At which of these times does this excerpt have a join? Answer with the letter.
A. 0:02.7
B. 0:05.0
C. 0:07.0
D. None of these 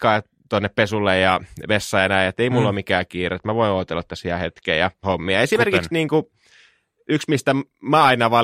B